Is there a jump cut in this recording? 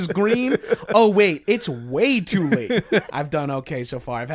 yes; 1 cut; at 3.1 s

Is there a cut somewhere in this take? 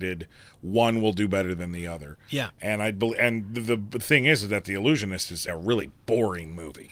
yes; 1 cut; at 5.5 s

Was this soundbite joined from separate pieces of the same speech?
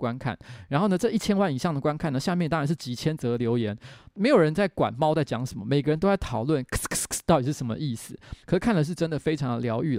yes; 1 cut; at 8.4 s

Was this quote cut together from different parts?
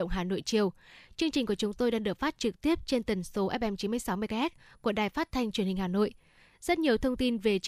no; 0 cuts

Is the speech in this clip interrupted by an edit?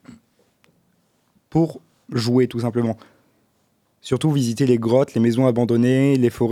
no; 0 cuts

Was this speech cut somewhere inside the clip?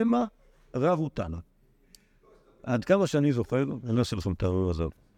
no; 0 cuts

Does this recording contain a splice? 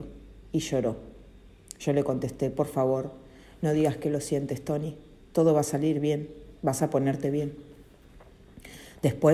no; 0 cuts

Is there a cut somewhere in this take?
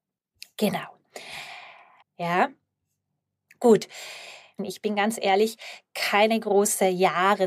yes; 2 cuts; at 2.0 s, 4.6 s

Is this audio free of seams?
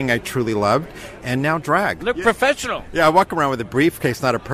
no; 1 cut; at 2.0 s

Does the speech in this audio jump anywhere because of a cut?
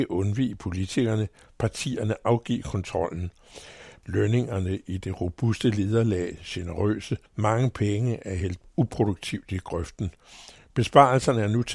yes; 3 cuts; at 1.5 s, 4.0 s, 7.3 s

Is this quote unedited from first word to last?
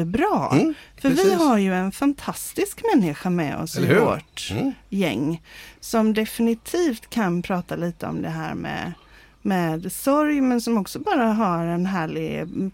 yes; 0 cuts

